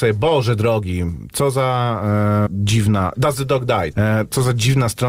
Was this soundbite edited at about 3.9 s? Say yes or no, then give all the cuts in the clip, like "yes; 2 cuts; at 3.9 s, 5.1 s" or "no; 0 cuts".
yes; 2 cuts; at 2.5 s, 3.9 s